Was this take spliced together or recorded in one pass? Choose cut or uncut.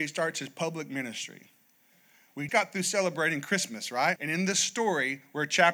cut